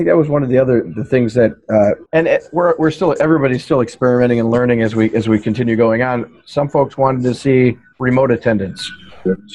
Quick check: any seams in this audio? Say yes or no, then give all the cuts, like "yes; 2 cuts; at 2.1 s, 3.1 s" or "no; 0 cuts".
yes; 1 cut; at 2.1 s